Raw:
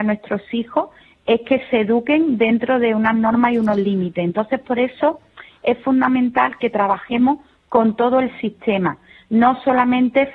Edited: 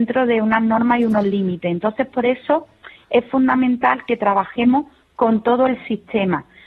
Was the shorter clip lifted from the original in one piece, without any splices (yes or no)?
yes